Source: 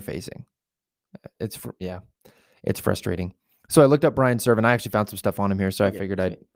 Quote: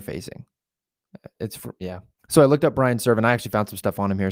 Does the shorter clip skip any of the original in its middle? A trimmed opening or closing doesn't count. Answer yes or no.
yes